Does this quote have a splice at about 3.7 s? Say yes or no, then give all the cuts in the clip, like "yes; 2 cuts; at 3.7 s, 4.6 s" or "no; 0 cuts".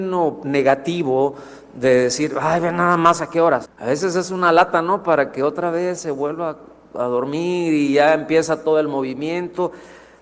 yes; 1 cut; at 3.7 s